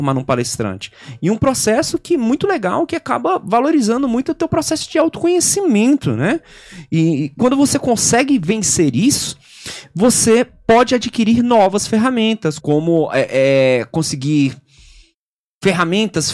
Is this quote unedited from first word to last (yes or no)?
no